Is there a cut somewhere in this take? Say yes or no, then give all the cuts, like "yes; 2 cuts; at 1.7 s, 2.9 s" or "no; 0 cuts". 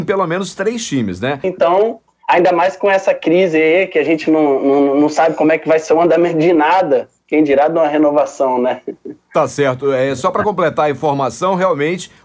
yes; 1 cut; at 1.4 s